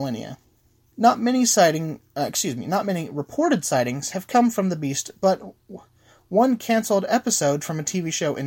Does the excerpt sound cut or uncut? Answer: cut